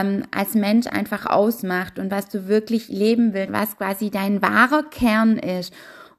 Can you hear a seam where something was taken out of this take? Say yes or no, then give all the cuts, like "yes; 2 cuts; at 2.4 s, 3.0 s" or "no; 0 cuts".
yes; 1 cut; at 3.5 s